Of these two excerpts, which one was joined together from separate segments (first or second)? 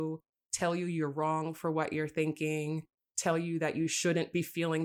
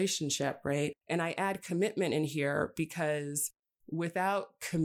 second